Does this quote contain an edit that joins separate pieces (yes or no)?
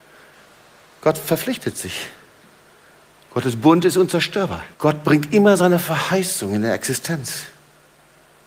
yes